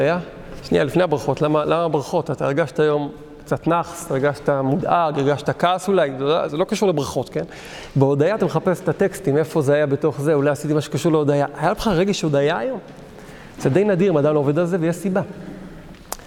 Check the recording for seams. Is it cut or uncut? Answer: uncut